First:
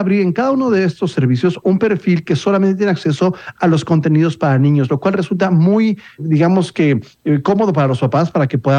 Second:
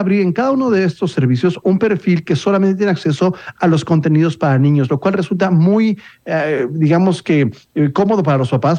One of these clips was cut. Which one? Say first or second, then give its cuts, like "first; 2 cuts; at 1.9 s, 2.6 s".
first; 1 cut; at 6.2 s